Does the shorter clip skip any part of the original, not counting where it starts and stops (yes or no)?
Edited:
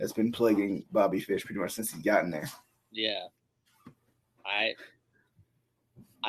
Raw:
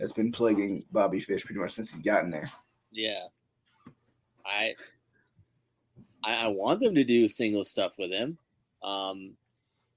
no